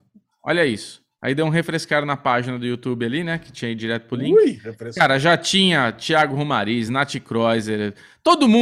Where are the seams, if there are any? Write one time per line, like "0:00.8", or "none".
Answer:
none